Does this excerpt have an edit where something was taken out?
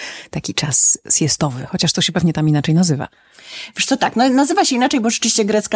no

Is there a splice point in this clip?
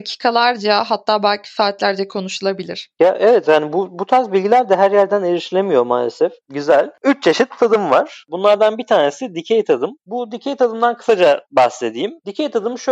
yes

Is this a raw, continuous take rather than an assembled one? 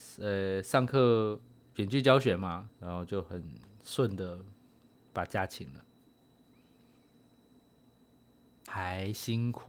no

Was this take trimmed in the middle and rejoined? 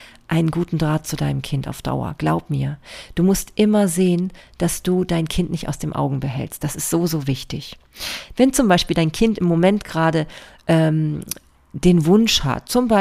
yes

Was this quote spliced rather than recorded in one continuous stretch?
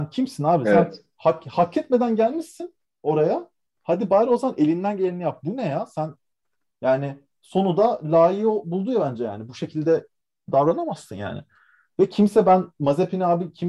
no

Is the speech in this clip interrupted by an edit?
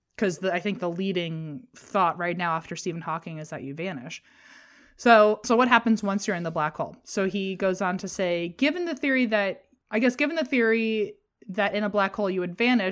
no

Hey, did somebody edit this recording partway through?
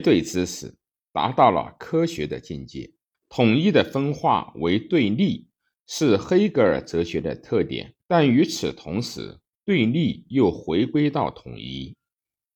yes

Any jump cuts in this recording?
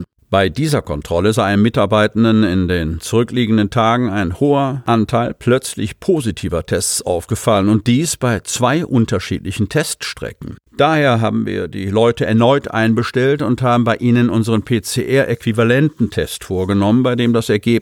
yes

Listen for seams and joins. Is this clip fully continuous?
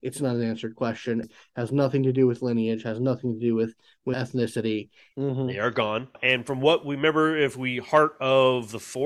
no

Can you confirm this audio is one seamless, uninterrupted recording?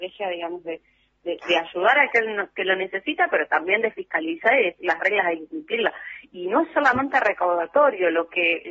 yes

